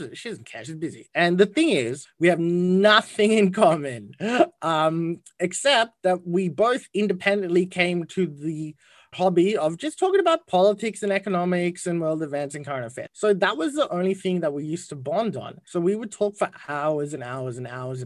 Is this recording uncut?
no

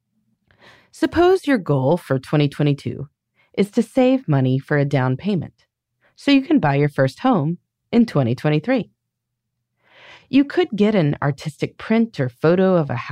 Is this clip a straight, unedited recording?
yes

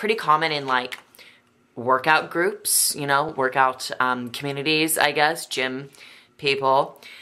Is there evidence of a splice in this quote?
no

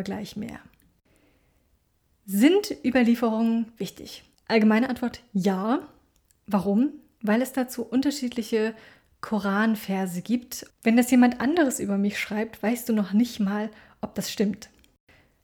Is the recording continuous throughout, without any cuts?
no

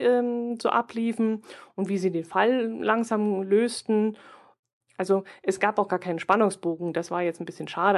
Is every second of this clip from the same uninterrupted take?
no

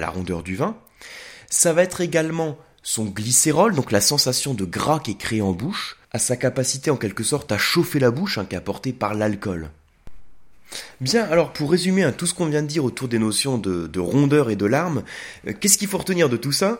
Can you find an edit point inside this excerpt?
yes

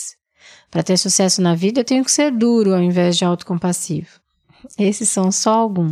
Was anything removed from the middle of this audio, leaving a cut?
no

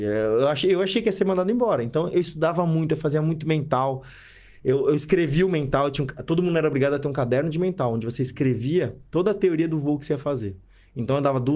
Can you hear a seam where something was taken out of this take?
no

